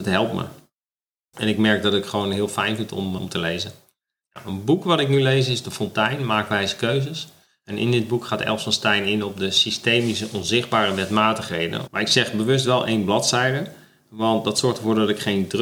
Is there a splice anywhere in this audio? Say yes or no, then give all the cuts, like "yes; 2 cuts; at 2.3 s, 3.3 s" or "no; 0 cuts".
yes; 2 cuts; at 3.2 s, 11.9 s